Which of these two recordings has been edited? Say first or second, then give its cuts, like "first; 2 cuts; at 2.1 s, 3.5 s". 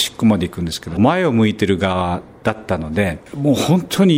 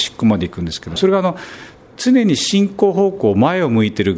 first; 1 cut; at 1.0 s